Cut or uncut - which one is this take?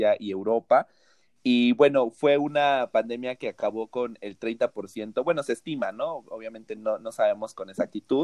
uncut